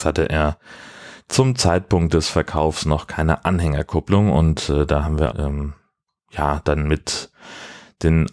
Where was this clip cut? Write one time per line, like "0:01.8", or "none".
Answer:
0:05.3